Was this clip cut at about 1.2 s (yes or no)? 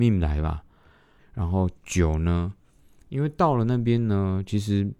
yes